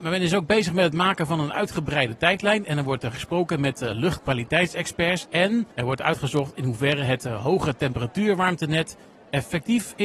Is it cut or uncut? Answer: cut